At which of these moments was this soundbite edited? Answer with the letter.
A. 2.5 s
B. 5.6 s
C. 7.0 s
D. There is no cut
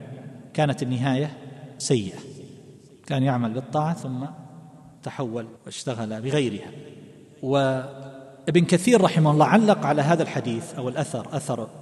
B